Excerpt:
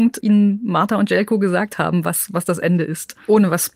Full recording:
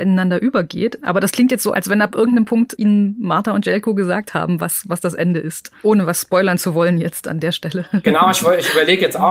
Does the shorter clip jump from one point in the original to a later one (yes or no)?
no